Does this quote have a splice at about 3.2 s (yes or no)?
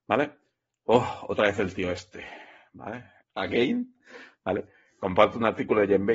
yes